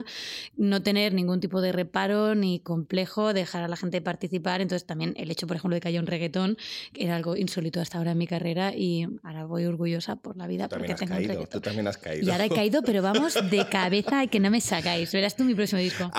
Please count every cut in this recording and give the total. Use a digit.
0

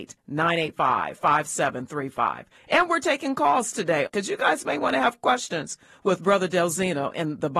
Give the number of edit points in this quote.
2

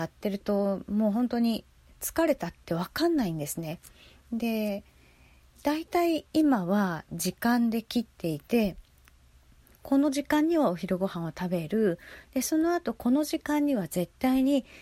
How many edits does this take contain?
0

